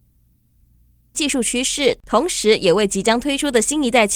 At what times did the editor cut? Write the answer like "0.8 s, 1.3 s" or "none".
1.1 s